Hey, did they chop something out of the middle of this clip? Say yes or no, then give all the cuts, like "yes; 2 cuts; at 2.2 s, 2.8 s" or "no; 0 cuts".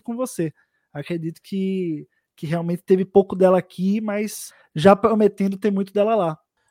no; 0 cuts